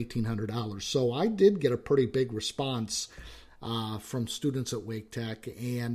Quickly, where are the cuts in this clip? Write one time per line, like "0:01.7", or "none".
none